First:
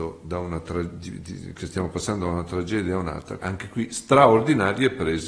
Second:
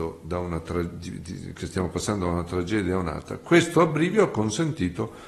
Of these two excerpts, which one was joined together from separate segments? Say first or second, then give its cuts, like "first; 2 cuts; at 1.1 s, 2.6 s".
first; 1 cut; at 3.4 s